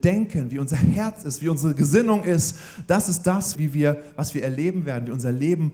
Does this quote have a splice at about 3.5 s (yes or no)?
yes